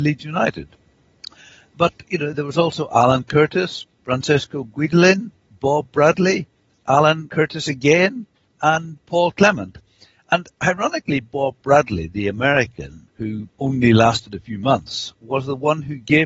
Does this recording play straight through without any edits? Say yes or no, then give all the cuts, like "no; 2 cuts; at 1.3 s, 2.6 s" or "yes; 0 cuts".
yes; 0 cuts